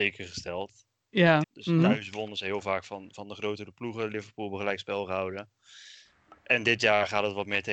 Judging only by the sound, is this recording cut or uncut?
cut